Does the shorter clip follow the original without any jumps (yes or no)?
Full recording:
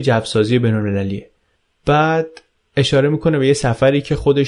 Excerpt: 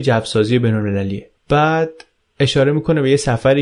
no